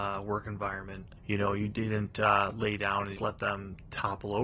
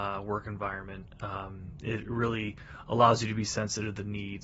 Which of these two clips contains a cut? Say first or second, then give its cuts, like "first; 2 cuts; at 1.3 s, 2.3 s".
first; 2 cuts; at 1.2 s, 3.2 s